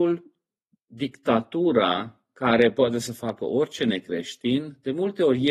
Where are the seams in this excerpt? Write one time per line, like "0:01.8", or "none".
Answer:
none